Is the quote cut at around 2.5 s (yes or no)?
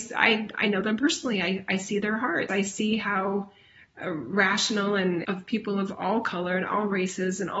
yes